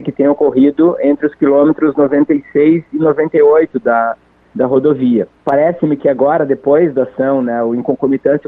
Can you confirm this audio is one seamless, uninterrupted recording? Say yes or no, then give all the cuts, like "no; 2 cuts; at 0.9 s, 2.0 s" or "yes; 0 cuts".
no; 1 cut; at 5.4 s